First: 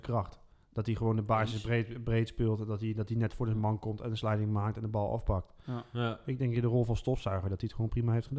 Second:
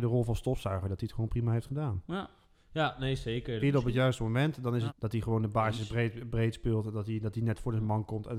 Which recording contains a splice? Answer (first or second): second